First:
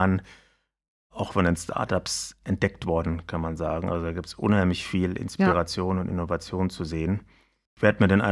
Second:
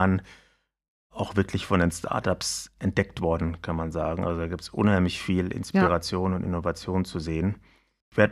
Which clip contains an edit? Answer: first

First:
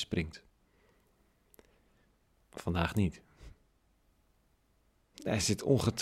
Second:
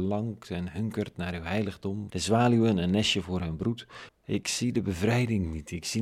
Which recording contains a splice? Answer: second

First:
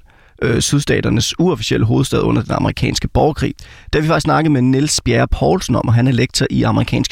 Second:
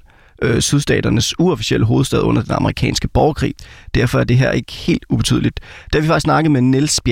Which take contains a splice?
first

